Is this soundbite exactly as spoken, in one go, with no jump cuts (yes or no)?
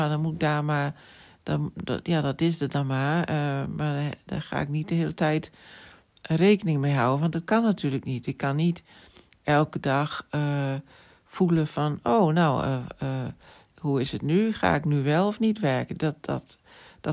yes